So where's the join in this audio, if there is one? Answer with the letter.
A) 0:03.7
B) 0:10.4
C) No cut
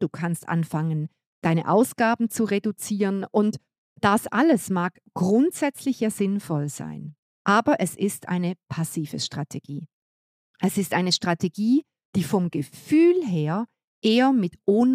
C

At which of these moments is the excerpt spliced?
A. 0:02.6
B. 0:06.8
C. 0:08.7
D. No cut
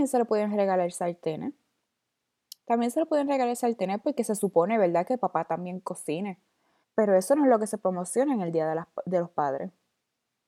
B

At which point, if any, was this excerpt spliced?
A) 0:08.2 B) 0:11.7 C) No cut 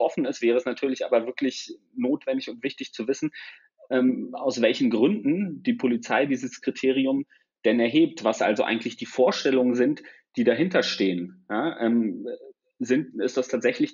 C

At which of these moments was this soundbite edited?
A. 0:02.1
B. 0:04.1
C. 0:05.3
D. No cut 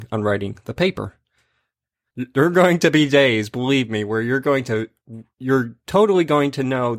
A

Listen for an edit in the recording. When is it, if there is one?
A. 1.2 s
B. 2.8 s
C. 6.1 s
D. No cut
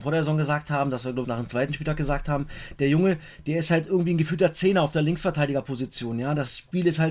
A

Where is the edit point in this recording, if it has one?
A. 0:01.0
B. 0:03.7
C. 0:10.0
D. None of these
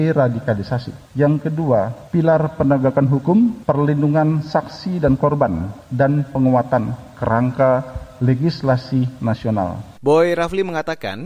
C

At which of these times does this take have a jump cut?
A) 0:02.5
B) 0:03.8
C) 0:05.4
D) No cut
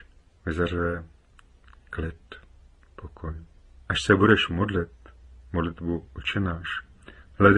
B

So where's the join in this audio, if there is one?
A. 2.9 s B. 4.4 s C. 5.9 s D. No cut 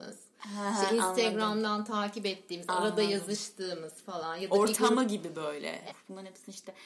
C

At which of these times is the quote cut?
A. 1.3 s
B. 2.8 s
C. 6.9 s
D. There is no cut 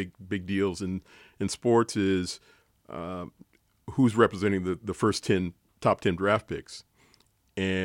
D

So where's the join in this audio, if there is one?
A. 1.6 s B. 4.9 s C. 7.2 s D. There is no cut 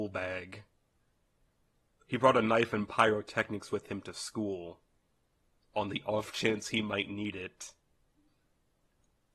D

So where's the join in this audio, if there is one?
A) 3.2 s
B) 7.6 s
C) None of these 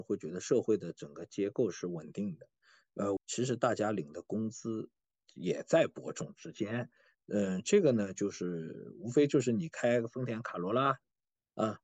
A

